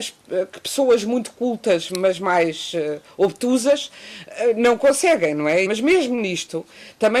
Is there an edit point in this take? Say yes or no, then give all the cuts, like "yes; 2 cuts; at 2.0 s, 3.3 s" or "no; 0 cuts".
yes; 1 cut; at 5.7 s